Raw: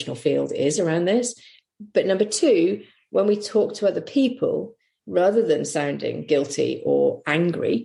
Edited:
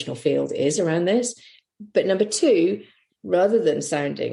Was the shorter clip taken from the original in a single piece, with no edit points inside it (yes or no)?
no